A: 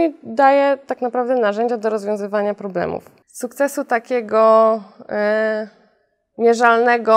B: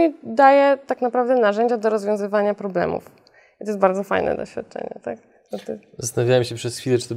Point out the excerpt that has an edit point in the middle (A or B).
A